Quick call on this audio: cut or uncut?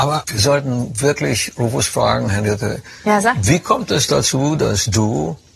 uncut